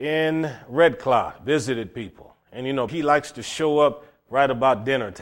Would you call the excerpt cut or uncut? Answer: cut